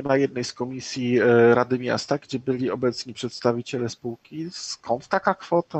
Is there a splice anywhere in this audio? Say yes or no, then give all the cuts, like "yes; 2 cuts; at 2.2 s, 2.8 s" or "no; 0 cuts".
no; 0 cuts